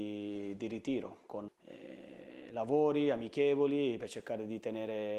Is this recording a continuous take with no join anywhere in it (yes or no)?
no